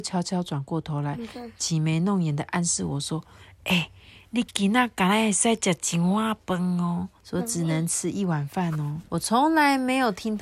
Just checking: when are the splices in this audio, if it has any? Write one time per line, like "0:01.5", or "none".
0:07.2
0:09.1